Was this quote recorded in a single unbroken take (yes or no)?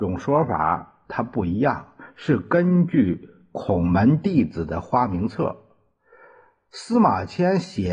yes